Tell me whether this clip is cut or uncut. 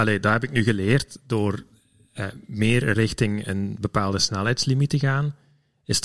uncut